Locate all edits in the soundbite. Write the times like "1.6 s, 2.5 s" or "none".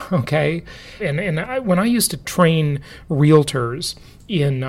1.0 s